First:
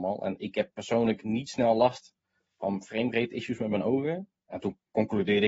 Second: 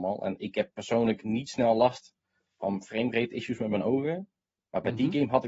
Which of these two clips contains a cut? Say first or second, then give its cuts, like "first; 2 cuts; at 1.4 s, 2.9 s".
first; 1 cut; at 4.4 s